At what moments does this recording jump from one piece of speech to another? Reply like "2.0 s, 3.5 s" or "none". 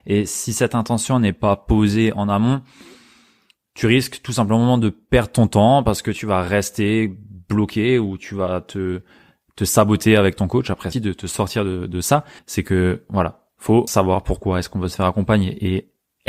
10.9 s, 12.4 s, 13.9 s